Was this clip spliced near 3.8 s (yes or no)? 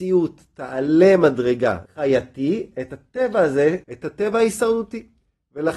yes